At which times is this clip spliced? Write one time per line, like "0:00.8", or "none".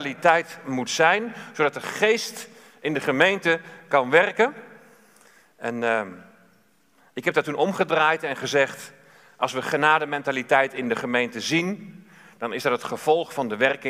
none